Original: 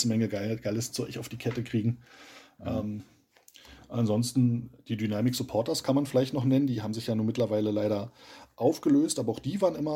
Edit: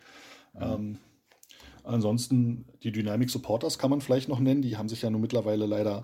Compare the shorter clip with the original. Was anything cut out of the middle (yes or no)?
no